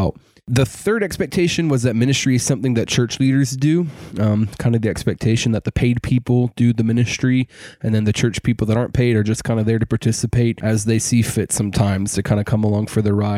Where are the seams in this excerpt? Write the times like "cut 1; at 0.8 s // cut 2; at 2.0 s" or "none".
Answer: none

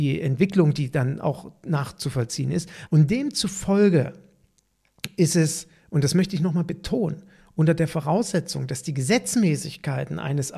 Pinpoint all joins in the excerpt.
cut 1; at 2.9 s

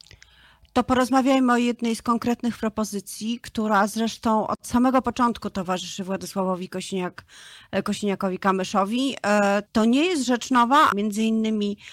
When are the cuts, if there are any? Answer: cut 1; at 9.7 s // cut 2; at 10.9 s

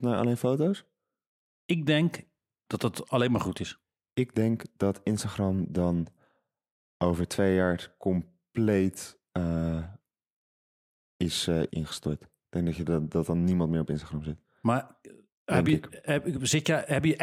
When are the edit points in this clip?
cut 1; at 11.7 s

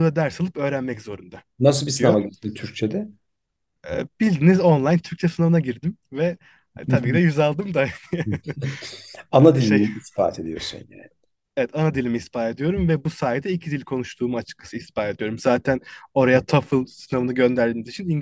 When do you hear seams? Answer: none

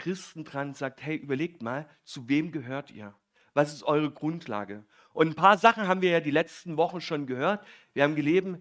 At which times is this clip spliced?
none

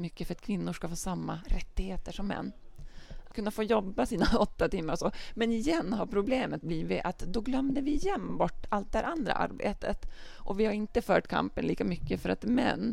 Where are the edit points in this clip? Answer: cut 1; at 3.3 s

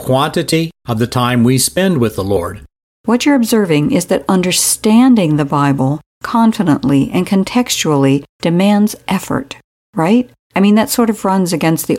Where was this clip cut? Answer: cut 1; at 2.9 s

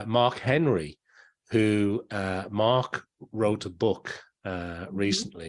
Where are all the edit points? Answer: none

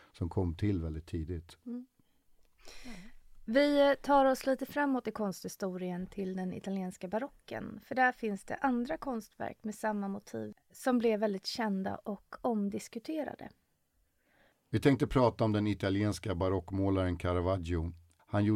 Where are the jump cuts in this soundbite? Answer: none

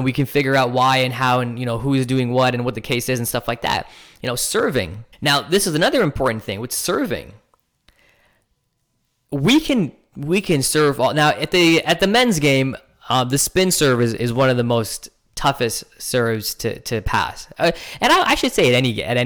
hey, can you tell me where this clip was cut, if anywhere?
cut 1; at 5.1 s

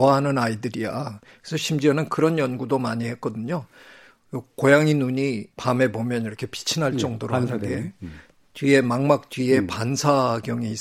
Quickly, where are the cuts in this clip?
cut 1; at 5.5 s

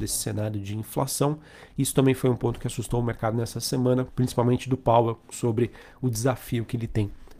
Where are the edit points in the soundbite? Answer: cut 1; at 4.1 s // cut 2; at 5.3 s

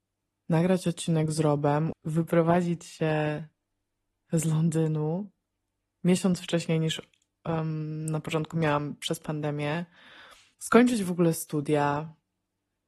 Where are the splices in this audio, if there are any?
cut 1; at 1.9 s // cut 2; at 10.5 s

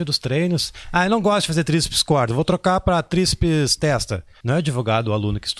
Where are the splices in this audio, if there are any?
cut 1; at 4.4 s

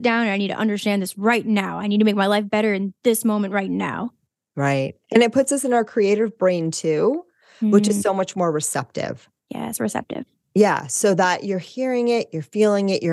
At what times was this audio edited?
none

